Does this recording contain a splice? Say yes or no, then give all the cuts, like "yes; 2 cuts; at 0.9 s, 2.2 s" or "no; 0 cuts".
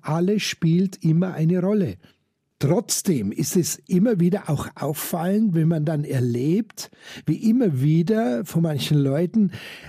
no; 0 cuts